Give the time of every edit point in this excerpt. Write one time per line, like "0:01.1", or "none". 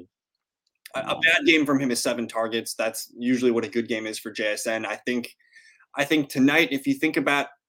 none